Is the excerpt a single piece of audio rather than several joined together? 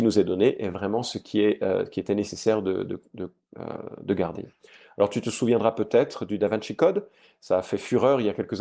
yes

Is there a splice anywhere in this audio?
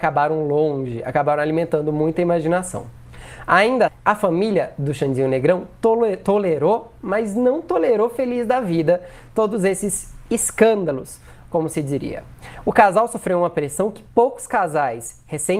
yes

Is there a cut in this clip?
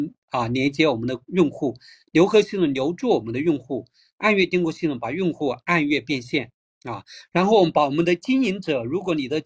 no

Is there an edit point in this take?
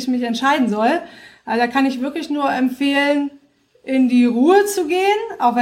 no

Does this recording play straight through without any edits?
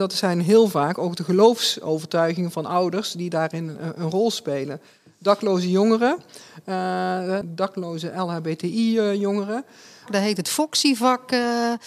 no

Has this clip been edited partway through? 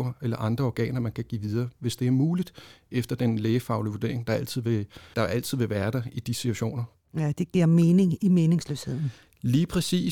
yes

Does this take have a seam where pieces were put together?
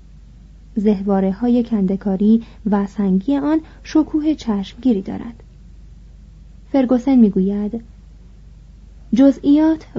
no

